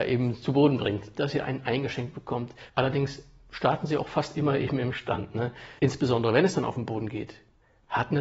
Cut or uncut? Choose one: cut